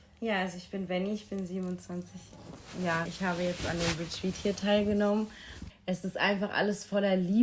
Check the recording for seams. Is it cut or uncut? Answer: cut